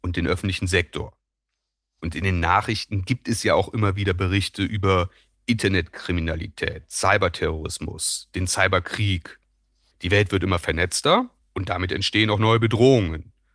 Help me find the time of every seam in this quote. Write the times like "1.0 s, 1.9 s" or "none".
9.9 s